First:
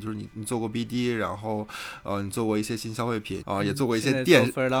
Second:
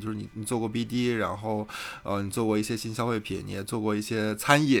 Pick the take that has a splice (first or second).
first